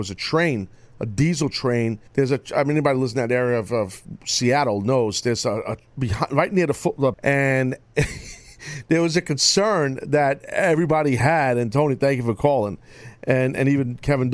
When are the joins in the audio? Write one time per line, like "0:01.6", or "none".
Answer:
0:02.1
0:07.1